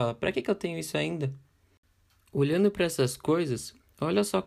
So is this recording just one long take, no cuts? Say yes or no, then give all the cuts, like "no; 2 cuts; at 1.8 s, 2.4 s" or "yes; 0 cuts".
yes; 0 cuts